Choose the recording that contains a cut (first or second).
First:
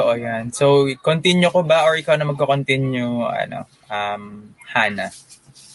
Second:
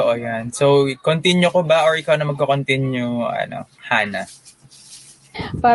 second